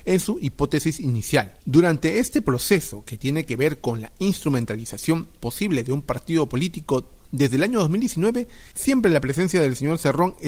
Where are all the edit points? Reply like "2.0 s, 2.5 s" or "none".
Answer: 1.6 s, 8.7 s